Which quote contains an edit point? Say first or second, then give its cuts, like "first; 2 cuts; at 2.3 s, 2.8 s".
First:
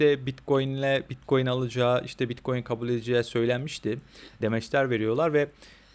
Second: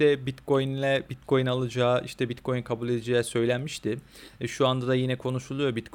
first; 1 cut; at 4.4 s